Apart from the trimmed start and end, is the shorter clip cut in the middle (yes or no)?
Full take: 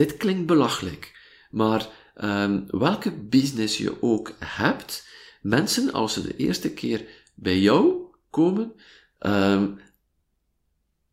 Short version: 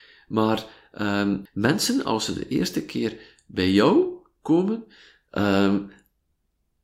yes